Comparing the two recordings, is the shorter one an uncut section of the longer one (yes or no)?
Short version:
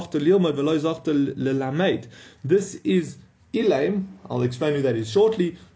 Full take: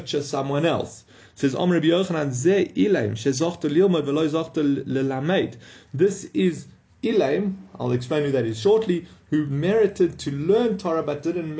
yes